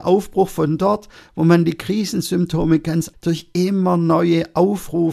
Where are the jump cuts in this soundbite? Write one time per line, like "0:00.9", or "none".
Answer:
0:03.1